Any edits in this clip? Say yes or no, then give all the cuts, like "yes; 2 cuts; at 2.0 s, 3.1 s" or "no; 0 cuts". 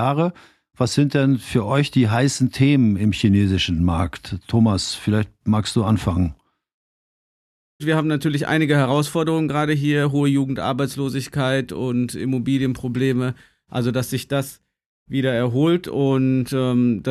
yes; 1 cut; at 7.8 s